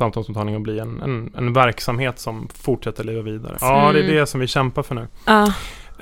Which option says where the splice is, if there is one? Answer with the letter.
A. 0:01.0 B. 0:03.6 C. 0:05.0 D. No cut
B